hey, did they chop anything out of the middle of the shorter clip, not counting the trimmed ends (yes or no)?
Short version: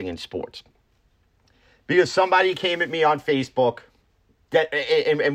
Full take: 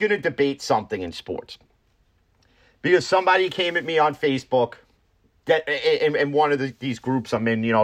no